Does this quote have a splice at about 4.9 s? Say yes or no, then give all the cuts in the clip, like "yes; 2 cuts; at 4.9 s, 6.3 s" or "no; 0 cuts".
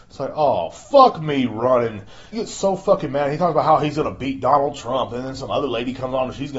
no; 1 cut; at 2.3 s